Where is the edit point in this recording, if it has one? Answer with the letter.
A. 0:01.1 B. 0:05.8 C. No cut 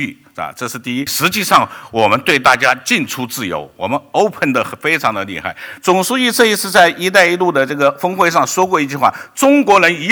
A